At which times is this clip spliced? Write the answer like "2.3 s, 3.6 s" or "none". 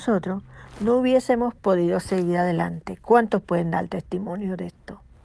none